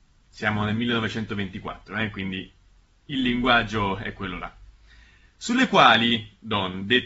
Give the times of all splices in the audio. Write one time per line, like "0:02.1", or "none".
none